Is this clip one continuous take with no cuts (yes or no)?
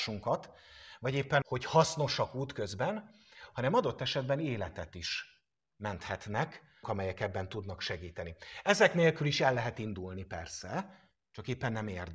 no